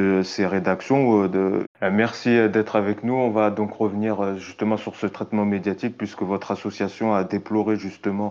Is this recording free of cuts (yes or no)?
no